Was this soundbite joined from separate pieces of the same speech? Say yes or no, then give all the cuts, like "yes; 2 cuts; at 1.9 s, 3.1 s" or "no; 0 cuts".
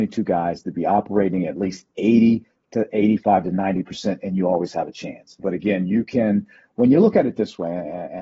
yes; 1 cut; at 5.4 s